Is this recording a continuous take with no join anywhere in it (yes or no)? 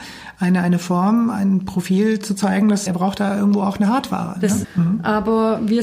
no